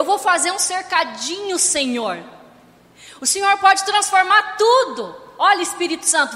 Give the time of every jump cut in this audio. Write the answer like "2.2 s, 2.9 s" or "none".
none

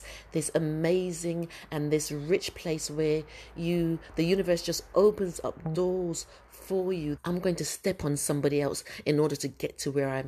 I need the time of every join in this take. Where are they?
7.2 s

